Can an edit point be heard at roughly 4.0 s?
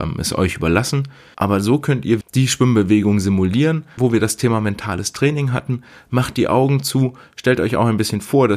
yes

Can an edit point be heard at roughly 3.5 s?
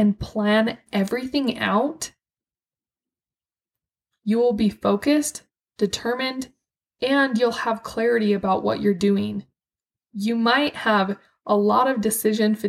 no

